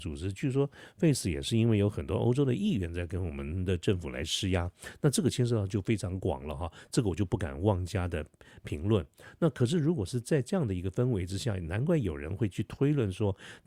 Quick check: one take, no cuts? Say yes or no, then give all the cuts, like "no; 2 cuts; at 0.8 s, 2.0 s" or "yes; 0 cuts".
yes; 0 cuts